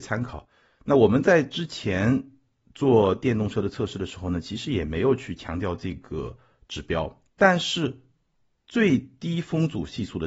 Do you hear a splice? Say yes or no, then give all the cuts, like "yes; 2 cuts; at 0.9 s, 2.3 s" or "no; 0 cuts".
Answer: yes; 1 cut; at 7.3 s